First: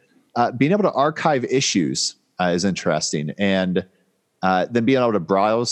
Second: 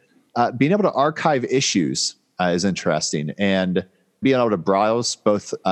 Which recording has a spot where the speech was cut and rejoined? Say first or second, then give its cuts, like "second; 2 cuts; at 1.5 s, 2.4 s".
second; 1 cut; at 4.2 s